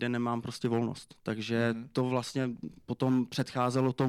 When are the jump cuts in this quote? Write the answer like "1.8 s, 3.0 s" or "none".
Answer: 2.8 s